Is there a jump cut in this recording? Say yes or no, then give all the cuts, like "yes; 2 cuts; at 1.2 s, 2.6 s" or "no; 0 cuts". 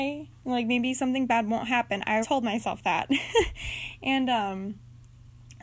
yes; 1 cut; at 2.2 s